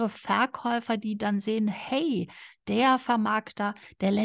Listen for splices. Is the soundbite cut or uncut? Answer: uncut